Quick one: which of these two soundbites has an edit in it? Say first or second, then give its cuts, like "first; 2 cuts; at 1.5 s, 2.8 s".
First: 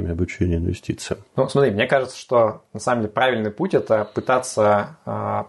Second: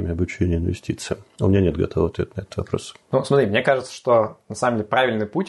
first; 1 cut; at 1.3 s